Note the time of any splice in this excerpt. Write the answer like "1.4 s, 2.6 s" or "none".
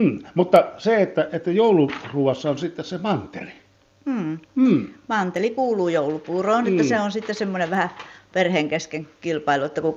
none